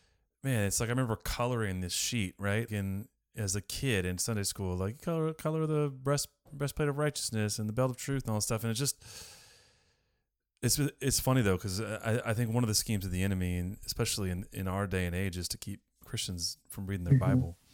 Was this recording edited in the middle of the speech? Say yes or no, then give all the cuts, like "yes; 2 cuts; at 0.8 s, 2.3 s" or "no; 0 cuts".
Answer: yes; 1 cut; at 2.7 s